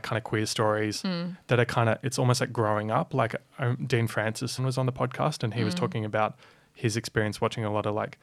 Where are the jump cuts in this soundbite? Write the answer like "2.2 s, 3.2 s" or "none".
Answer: 4.6 s